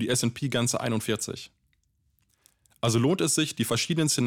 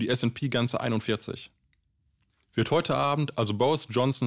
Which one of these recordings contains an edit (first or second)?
second